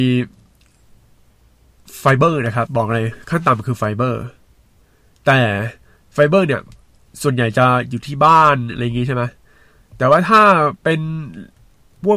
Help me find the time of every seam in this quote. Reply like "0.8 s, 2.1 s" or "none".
2.7 s